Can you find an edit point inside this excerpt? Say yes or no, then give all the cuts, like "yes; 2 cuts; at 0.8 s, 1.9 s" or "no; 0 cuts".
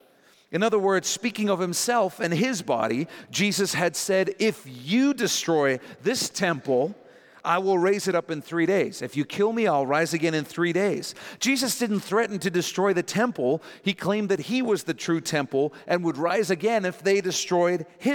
no; 0 cuts